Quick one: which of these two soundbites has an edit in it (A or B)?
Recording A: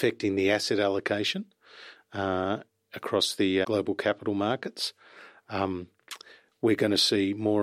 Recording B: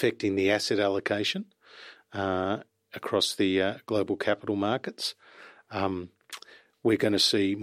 A